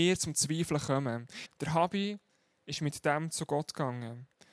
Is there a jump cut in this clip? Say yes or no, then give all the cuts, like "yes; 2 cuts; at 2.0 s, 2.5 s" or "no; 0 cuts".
yes; 1 cut; at 1.5 s